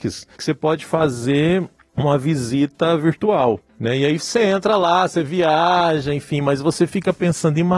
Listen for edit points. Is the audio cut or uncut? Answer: uncut